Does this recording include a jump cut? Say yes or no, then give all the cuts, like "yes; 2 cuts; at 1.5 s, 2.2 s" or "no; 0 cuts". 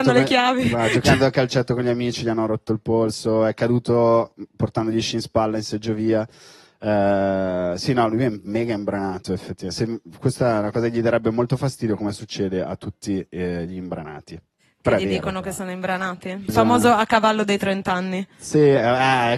yes; 1 cut; at 16.5 s